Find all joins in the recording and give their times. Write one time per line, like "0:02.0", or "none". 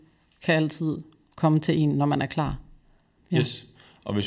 0:03.2

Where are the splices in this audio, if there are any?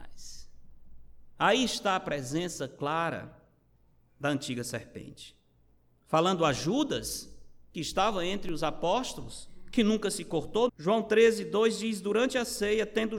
0:10.7

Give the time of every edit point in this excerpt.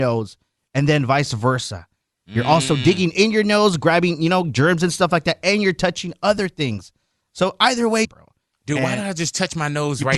0:08.0

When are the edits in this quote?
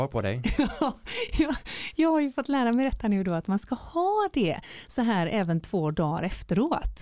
none

